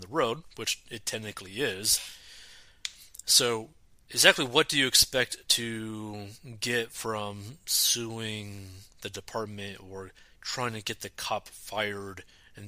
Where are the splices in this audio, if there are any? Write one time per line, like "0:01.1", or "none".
none